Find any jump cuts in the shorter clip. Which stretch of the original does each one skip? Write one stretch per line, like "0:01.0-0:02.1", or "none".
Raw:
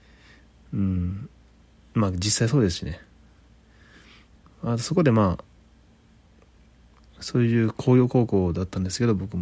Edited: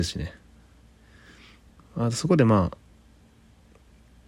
none